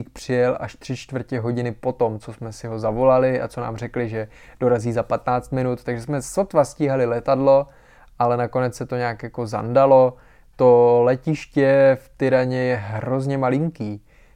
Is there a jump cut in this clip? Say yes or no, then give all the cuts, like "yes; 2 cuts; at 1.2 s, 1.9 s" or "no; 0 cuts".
no; 0 cuts